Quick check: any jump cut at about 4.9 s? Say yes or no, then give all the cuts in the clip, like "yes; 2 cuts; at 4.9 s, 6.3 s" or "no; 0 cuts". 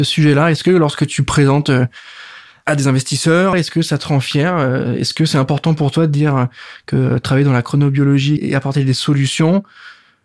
no; 2 cuts; at 3.5 s, 8.4 s